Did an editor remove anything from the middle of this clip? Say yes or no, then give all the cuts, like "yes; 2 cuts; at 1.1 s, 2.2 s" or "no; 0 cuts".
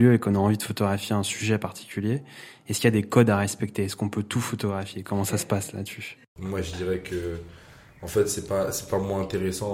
no; 0 cuts